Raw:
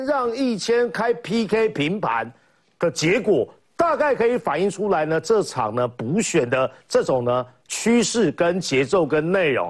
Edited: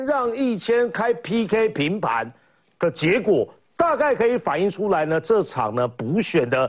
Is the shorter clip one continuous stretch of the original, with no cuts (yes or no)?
yes